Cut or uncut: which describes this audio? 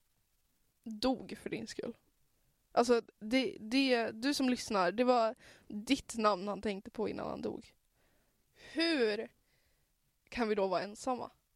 cut